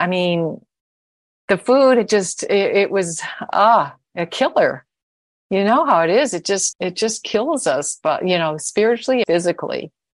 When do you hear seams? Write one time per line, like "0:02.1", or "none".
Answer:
0:06.7
0:09.2